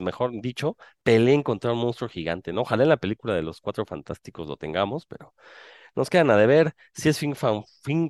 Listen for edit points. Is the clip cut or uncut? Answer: uncut